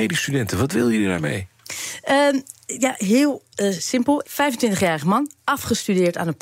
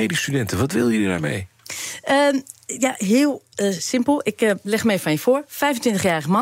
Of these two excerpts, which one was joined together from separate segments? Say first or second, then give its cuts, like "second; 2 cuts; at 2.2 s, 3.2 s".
first; 1 cut; at 4.2 s